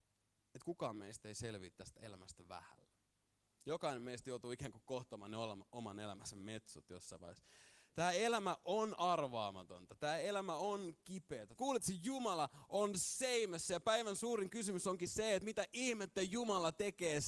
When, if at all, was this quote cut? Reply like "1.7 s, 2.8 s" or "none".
11.6 s